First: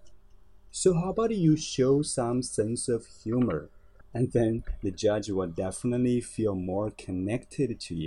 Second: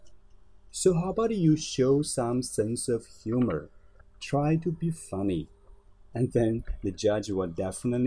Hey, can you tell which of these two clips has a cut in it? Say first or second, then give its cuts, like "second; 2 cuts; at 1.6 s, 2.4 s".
first; 1 cut; at 4.0 s